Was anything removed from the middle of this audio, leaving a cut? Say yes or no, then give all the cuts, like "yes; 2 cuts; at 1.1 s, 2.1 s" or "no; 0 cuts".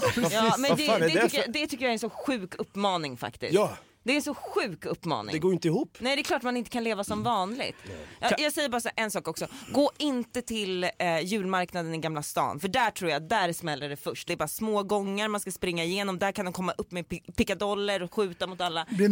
yes; 1 cut; at 14.3 s